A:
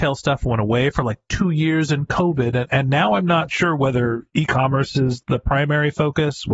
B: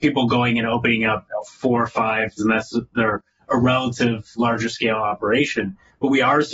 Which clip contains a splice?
B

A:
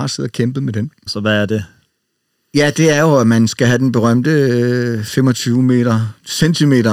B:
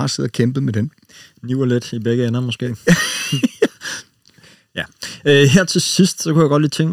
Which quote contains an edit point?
A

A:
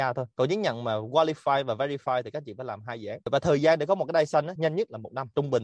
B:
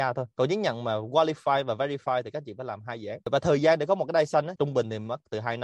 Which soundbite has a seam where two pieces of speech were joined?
B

